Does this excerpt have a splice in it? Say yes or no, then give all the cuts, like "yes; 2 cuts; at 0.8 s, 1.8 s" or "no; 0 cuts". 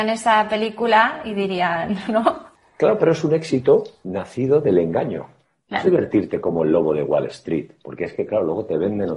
yes; 2 cuts; at 4.0 s, 5.8 s